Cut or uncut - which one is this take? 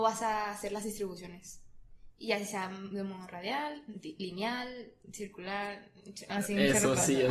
uncut